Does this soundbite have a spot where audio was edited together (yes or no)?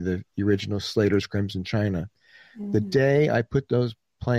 no